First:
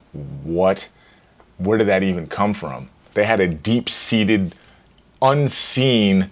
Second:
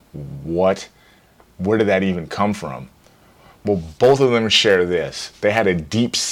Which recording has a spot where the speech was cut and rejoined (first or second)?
first